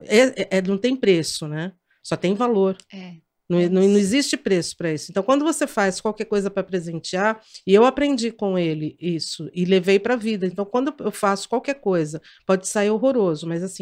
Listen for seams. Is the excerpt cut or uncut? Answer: uncut